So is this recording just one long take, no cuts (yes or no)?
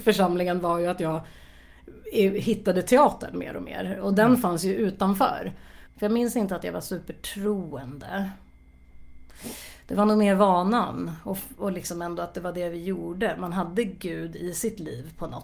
no